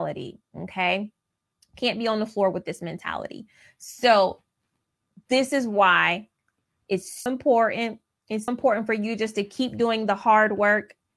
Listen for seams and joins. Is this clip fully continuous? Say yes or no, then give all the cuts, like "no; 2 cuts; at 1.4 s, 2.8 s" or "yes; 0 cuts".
no; 2 cuts; at 7.3 s, 8.5 s